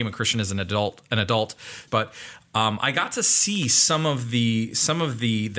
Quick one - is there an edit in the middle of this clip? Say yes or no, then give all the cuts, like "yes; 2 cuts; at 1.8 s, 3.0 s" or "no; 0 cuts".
yes; 1 cut; at 1.9 s